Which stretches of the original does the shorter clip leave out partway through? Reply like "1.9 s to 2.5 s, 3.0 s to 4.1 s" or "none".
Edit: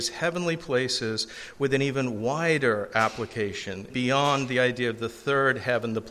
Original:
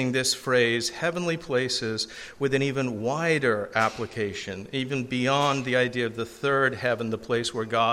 4.7 s to 5.1 s